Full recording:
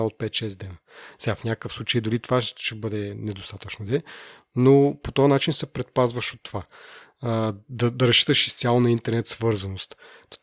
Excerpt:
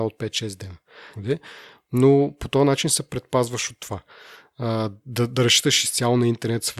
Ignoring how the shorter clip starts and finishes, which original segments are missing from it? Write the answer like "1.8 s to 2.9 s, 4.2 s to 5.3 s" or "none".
1.2 s to 3.8 s

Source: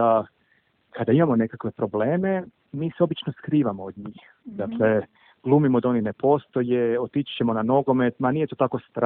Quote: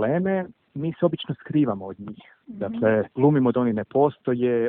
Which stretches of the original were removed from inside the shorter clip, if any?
5.1 s to 5.4 s

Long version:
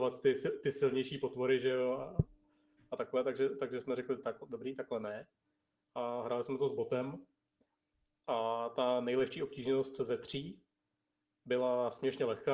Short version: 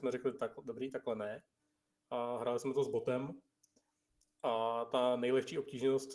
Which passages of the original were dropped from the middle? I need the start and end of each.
none

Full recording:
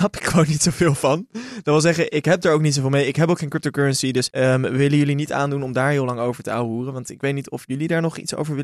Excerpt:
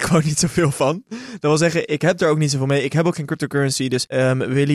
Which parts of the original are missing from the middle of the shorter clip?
none

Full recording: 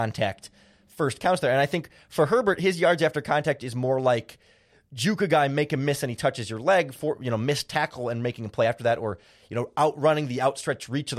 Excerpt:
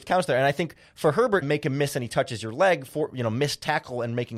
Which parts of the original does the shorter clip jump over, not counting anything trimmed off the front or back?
2.6 s to 5.5 s

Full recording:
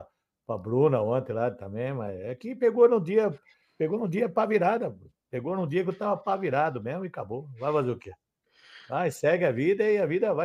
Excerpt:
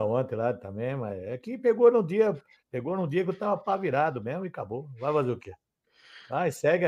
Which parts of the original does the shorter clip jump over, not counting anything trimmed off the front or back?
3.6 s to 5.2 s

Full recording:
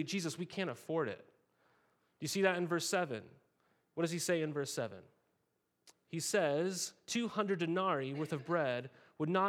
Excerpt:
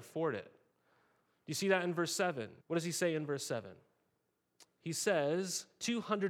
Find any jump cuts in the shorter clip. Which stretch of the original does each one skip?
3.3 s to 3.9 s

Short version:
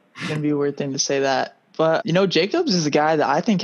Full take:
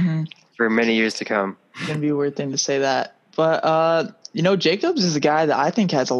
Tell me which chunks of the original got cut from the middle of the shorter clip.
3.6 s to 4.3 s

